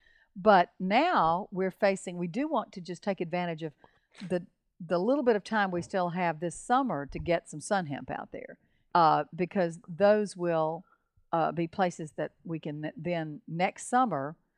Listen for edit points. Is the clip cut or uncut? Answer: cut